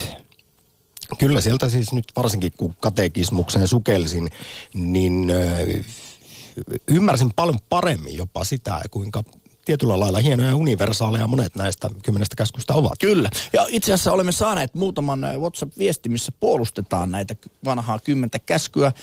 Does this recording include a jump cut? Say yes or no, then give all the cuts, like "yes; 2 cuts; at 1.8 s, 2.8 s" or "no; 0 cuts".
no; 0 cuts